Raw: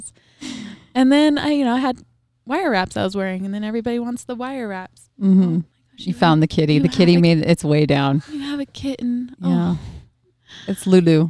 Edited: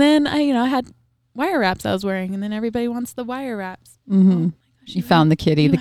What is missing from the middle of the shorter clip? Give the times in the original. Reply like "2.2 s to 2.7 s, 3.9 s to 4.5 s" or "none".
none